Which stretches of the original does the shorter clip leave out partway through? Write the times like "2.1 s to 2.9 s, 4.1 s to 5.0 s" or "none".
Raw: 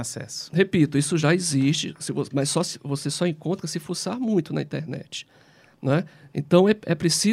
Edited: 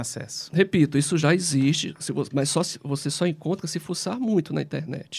none